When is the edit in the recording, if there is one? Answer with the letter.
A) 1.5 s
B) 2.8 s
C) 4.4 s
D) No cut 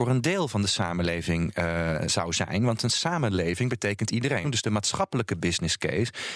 C